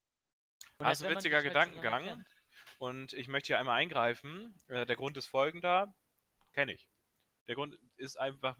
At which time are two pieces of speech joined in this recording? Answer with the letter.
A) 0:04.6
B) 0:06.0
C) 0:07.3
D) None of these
D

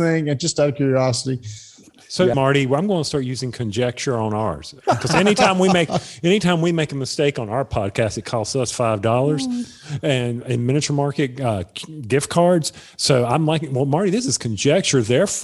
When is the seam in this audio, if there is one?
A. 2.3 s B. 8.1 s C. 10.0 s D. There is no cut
A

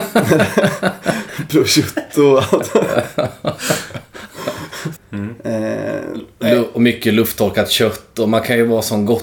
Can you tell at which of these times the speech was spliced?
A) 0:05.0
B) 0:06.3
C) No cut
A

